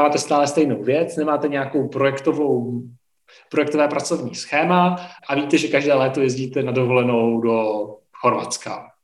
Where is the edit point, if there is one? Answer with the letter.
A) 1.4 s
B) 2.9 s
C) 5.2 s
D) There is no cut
C